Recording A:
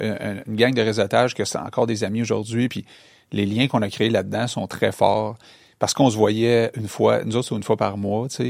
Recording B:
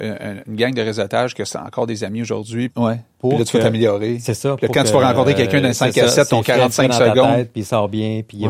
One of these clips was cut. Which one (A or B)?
B